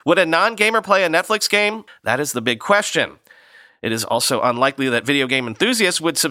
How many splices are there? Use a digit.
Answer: 1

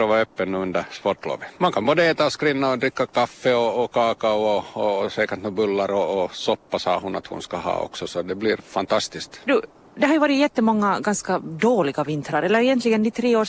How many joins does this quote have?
2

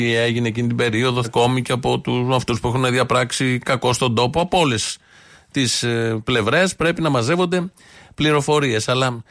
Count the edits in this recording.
1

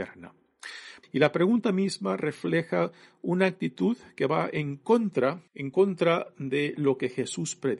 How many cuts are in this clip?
2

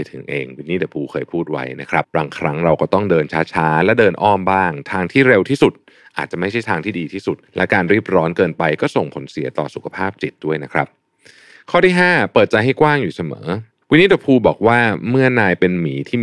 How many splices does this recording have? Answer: 2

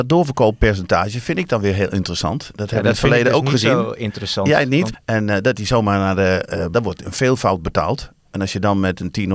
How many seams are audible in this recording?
2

